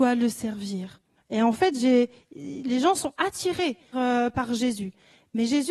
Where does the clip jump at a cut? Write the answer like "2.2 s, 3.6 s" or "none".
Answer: 1.2 s, 3.9 s